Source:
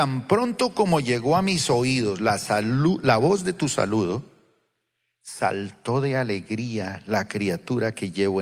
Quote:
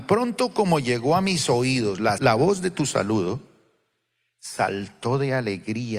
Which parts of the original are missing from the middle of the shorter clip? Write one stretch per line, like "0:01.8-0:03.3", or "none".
0:02.4-0:03.0